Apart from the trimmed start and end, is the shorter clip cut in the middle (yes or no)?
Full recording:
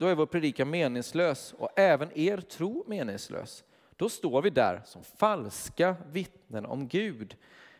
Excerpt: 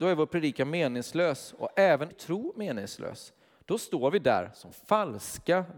yes